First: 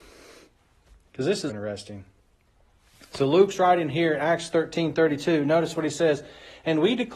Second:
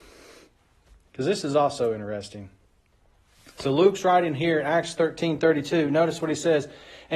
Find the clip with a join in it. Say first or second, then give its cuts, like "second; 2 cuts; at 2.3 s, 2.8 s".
first; 1 cut; at 1.5 s